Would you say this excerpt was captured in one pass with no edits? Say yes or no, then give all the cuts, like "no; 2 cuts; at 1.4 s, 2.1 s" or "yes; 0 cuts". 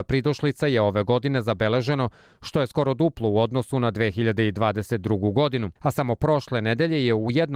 no; 1 cut; at 5.8 s